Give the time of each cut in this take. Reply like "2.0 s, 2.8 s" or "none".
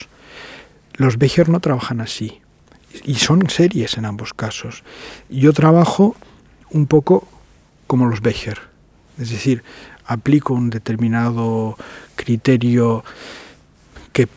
none